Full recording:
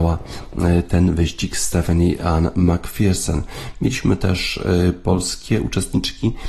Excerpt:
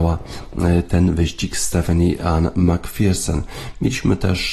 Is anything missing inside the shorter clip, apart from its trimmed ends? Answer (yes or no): no